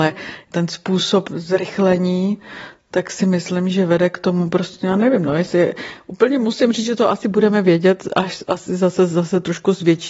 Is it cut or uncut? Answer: uncut